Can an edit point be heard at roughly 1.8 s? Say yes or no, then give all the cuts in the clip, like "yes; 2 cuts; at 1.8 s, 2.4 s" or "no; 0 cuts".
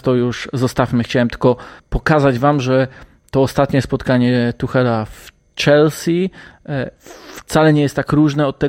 yes; 1 cut; at 1.8 s